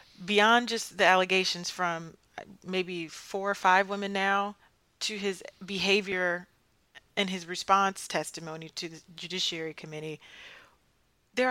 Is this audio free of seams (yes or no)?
yes